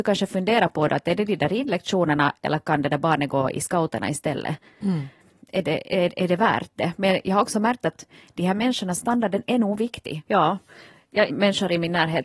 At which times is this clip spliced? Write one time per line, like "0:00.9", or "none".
0:09.0
0:10.3
0:11.3